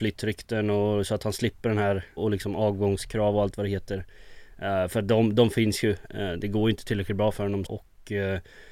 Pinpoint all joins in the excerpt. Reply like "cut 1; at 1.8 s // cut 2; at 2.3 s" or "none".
cut 1; at 2.2 s // cut 2; at 7.7 s